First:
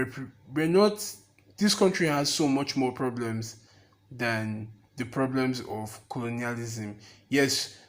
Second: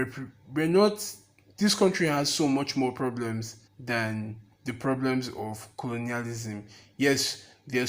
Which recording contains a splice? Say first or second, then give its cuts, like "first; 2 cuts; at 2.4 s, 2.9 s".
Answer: second; 1 cut; at 3.7 s